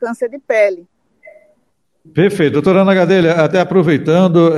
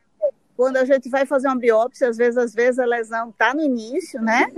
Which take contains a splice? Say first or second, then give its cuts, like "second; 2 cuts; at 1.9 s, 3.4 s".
first; 1 cut; at 2.0 s